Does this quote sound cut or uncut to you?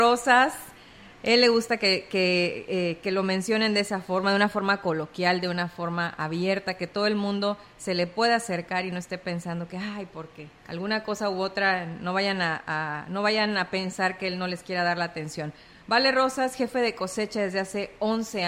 cut